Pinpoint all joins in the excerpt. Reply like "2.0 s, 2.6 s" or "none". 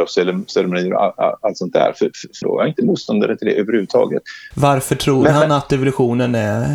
2.4 s, 4.5 s